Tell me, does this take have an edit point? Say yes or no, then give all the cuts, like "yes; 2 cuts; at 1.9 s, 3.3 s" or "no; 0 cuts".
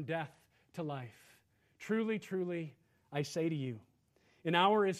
no; 0 cuts